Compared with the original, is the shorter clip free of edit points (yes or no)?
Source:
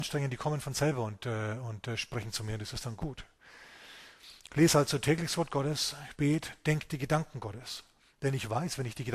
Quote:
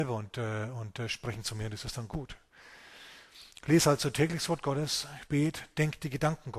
yes